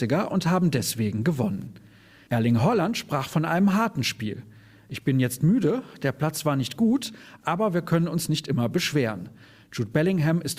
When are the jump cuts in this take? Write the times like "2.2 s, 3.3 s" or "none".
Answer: none